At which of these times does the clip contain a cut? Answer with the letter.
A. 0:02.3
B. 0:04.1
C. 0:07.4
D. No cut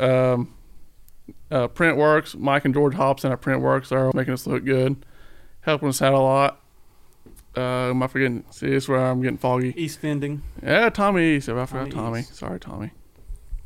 B